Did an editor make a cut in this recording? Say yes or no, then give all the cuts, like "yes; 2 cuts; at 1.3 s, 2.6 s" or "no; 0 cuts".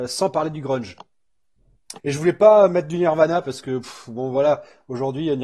yes; 1 cut; at 2.0 s